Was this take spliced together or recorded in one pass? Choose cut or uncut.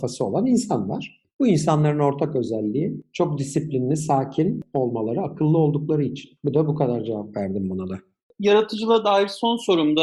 uncut